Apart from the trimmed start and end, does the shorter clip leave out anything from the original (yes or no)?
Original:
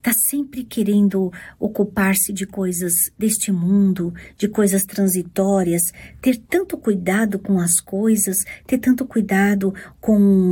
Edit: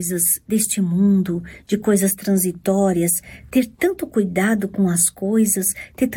no